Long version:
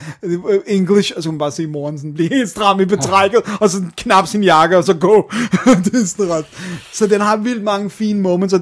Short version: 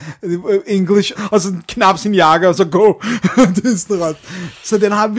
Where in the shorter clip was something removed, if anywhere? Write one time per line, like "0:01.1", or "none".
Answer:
0:01.1